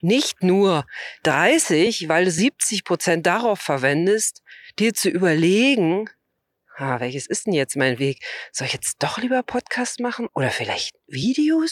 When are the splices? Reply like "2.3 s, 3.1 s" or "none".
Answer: 10.3 s